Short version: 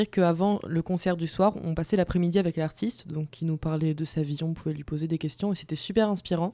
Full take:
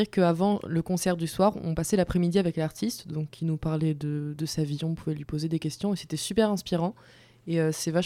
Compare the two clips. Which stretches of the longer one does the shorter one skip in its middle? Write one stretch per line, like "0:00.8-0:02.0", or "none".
0:04.0-0:04.4